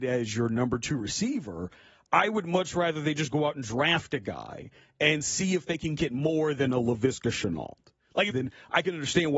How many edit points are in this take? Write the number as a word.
one